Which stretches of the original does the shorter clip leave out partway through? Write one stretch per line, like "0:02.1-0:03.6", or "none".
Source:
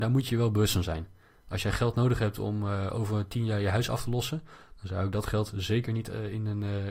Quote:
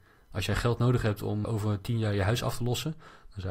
0:02.6-0:02.9